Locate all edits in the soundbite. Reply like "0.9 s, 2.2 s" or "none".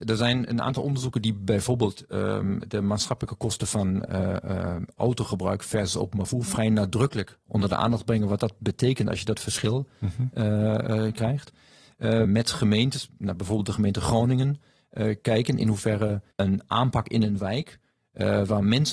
12.2 s, 16.3 s